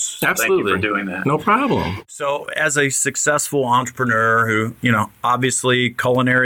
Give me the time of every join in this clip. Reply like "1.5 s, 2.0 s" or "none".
none